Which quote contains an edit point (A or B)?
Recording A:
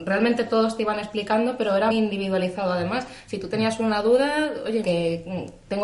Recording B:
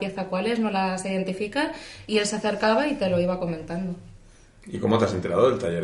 A